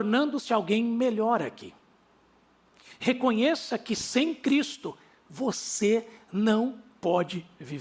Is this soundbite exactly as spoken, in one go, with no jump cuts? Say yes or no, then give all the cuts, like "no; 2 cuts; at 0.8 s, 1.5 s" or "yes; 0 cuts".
yes; 0 cuts